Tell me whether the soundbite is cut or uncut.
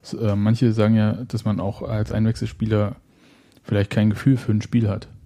uncut